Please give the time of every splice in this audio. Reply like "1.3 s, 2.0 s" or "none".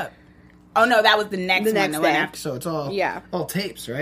2.3 s

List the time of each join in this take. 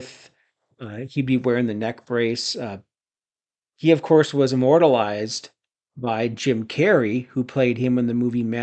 none

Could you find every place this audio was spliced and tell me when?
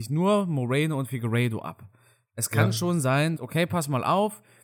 3.4 s

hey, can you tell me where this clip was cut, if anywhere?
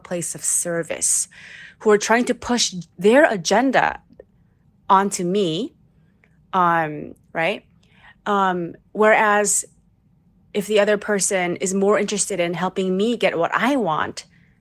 7.2 s

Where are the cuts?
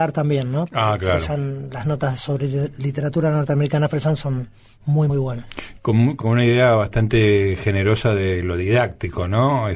5.1 s, 6.2 s

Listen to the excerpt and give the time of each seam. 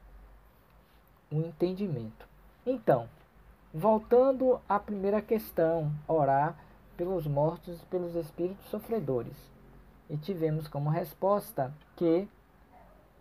2.6 s, 6.1 s, 11.9 s

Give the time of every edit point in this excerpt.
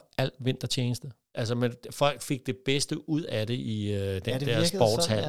1.3 s

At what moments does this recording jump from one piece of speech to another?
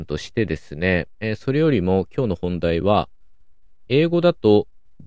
3.9 s

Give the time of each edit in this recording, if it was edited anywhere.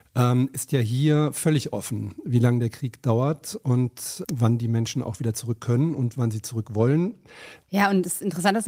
4.2 s, 7.6 s

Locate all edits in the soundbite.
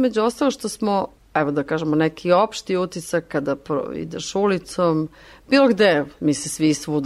none

